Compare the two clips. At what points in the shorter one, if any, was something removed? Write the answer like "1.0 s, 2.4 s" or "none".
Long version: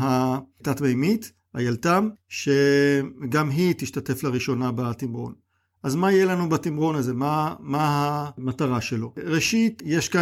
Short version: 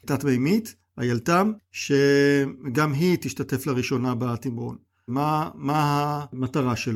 5.1 s